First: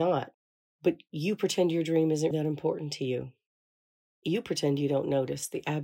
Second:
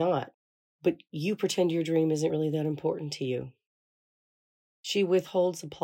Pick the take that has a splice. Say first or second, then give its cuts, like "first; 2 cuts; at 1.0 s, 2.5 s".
first; 2 cuts; at 2.3 s, 4.1 s